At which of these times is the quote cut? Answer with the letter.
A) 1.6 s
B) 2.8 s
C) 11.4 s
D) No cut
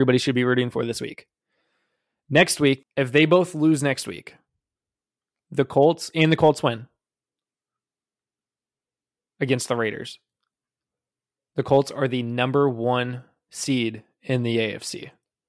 B